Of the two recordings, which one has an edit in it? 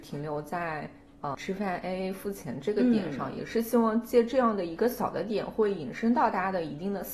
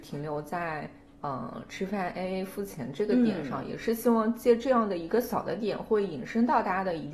first; 1 cut; at 1.3 s

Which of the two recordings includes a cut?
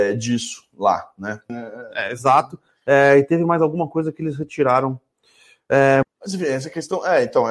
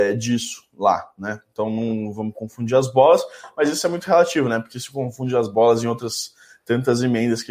first; 2 cuts; at 1.5 s, 6.0 s

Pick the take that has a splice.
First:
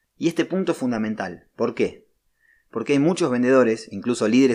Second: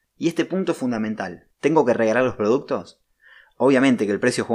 second; 1 cut; at 1.5 s

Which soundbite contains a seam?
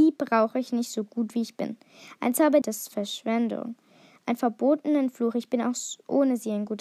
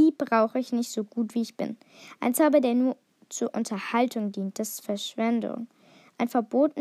first; 1 cut; at 2.6 s

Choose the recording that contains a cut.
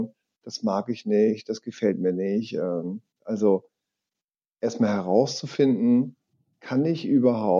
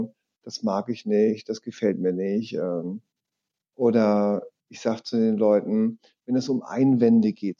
first; 1 cut; at 3.2 s

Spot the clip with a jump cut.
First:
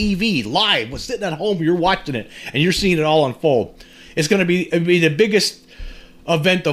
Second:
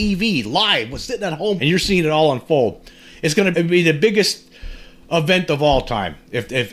second; 2 cuts; at 1.6 s, 3.5 s

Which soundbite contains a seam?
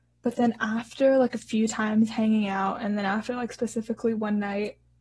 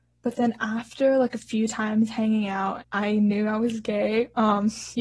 second; 1 cut; at 2.8 s

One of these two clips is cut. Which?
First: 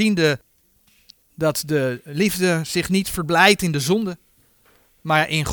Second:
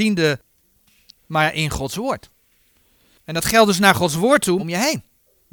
second; 2 cuts; at 1.2 s, 4.6 s

